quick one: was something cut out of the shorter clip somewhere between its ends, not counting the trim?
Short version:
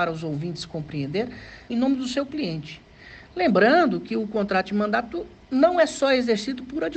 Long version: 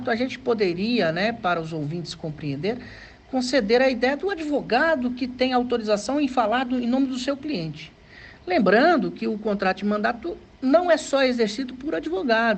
yes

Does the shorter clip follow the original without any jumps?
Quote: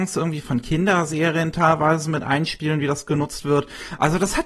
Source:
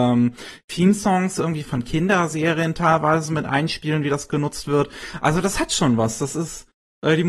yes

